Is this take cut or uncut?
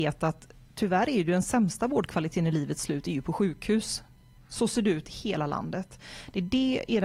uncut